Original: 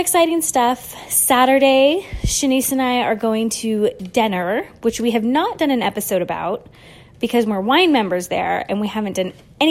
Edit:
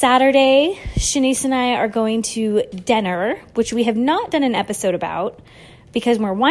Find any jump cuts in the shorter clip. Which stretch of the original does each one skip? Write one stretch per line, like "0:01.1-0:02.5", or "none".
none